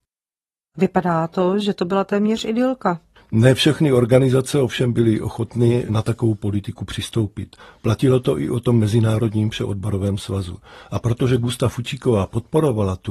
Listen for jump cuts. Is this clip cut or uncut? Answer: cut